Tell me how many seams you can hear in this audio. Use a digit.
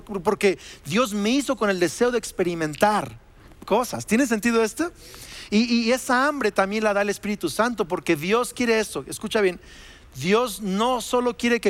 0